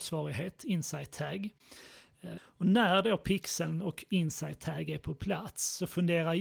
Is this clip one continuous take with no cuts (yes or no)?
no